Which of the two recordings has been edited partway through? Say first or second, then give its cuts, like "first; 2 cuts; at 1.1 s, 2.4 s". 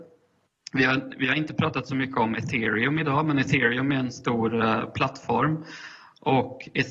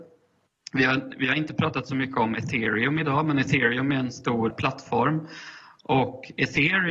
second; 1 cut; at 4.5 s